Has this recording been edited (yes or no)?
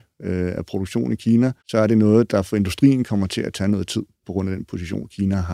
yes